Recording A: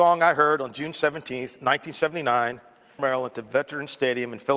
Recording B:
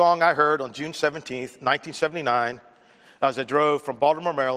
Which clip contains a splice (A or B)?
A